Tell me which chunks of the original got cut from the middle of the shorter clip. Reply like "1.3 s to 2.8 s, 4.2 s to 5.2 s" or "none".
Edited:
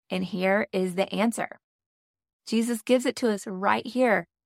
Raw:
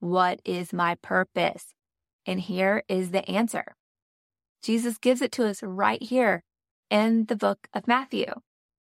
none

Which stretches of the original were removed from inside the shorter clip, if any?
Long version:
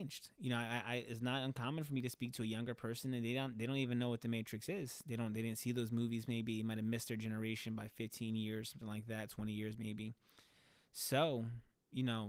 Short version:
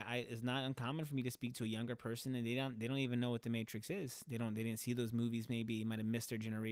none

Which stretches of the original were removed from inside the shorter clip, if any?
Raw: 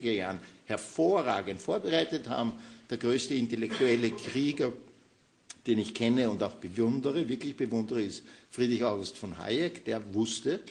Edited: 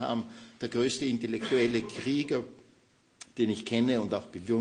none

